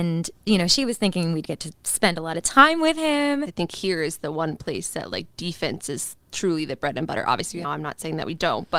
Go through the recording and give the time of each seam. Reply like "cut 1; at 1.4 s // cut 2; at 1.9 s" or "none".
cut 1; at 3.5 s // cut 2; at 7.6 s

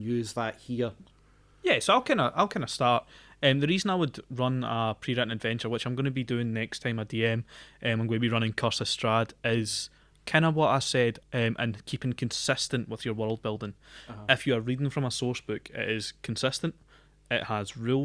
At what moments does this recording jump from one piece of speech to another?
cut 1; at 11.2 s

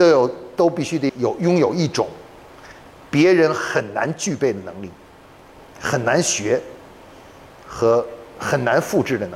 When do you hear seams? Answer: cut 1; at 1.1 s

